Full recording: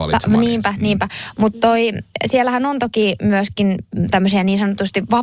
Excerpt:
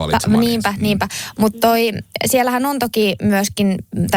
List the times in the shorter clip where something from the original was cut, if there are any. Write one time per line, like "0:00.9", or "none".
none